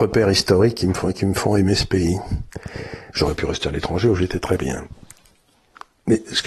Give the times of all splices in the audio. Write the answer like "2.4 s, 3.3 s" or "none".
none